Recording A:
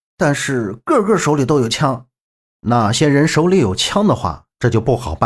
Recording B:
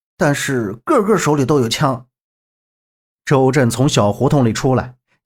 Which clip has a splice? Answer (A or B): A